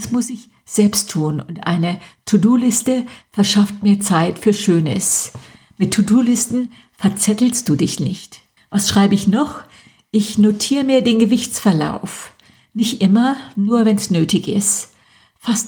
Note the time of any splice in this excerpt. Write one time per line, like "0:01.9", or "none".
0:08.6